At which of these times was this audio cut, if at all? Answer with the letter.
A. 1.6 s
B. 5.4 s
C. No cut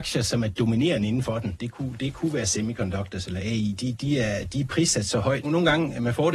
B